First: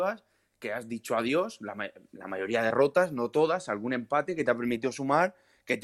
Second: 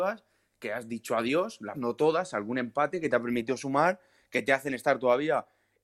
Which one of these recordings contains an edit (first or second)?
second